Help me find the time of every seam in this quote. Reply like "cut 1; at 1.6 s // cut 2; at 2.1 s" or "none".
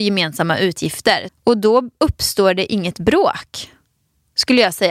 cut 1; at 1.3 s